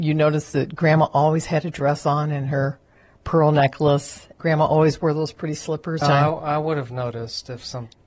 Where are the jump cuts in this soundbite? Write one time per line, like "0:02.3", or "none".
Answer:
0:04.4
0:06.0